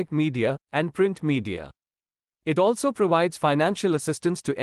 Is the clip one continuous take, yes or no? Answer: yes